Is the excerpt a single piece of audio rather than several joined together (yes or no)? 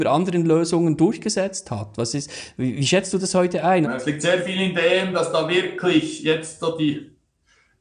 no